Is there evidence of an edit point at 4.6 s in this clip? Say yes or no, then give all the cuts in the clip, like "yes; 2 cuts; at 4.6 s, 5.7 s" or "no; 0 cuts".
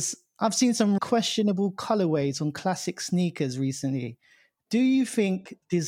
no; 1 cut; at 1.0 s